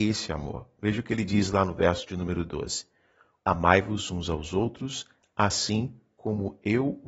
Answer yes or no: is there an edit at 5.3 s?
no